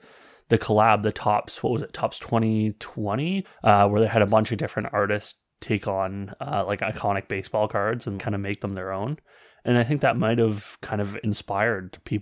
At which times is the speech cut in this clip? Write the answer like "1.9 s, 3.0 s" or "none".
3.4 s, 8.2 s